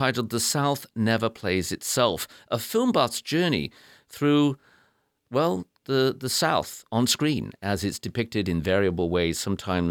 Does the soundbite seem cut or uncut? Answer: uncut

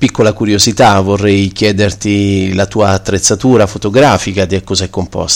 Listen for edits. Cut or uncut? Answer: uncut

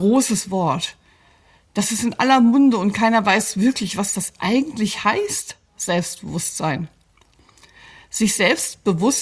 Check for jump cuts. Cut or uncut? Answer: uncut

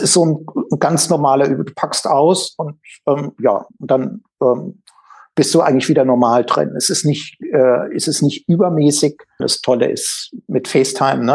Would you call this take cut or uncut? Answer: cut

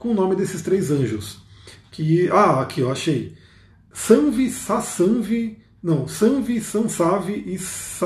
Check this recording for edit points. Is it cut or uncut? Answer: uncut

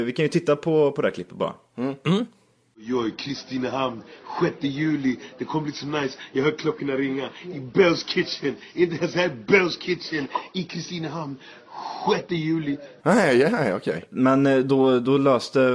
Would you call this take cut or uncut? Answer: cut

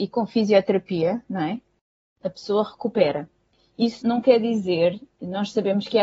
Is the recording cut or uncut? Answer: cut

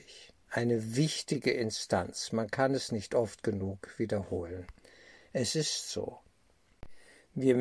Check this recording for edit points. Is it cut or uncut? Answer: uncut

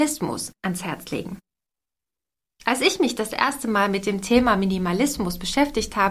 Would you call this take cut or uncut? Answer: uncut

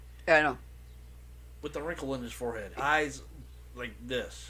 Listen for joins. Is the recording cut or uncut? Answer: cut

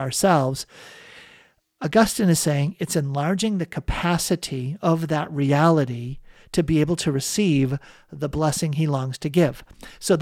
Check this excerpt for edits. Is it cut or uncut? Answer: uncut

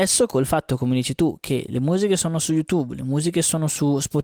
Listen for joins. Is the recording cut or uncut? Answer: uncut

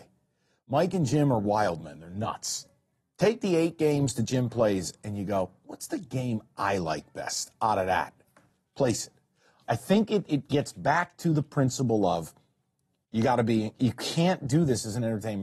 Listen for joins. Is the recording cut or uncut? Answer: uncut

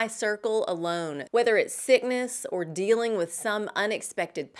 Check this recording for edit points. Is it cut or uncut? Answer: cut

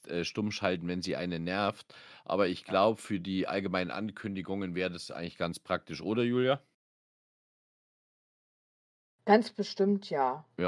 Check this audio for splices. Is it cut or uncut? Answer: uncut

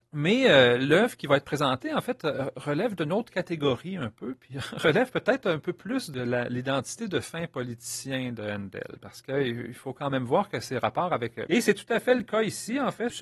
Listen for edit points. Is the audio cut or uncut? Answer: cut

